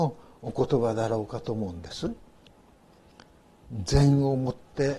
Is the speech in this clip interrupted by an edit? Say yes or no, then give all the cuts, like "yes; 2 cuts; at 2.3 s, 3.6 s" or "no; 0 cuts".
no; 0 cuts